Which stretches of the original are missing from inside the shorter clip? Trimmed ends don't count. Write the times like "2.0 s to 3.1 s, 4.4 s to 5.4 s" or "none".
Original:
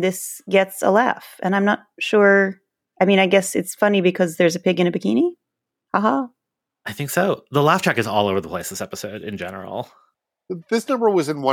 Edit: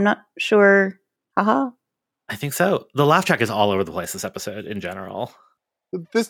2.8 s to 5.7 s

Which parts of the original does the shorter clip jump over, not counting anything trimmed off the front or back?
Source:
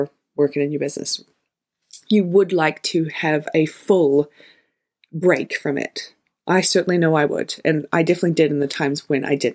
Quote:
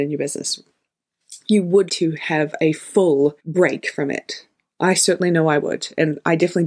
2.5 s to 2.8 s, 4.3 s to 5.1 s

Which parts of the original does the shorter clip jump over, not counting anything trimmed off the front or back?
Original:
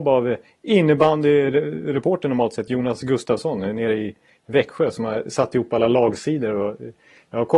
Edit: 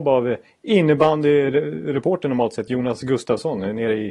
none

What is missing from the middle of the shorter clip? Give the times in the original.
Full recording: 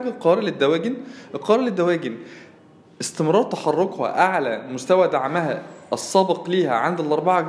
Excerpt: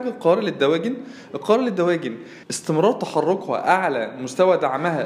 2.4 s to 2.9 s

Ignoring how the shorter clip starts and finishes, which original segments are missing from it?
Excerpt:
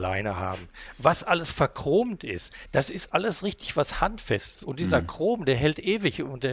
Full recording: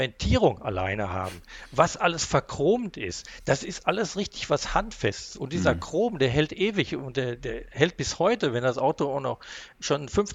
none

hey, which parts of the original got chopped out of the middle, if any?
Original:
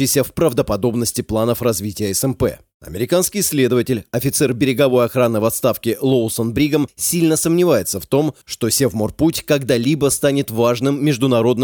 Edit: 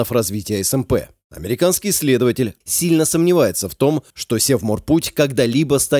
4.1 s to 6.9 s

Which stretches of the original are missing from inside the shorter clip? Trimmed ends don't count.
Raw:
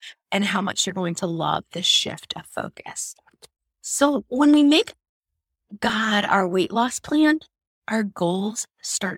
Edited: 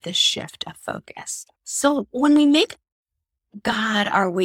3.2 s to 3.7 s

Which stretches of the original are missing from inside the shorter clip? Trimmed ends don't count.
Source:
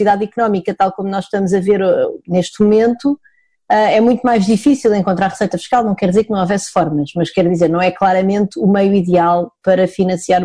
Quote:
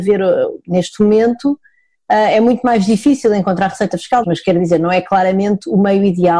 5.8 s to 7.1 s

